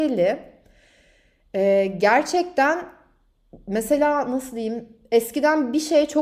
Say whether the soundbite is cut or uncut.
uncut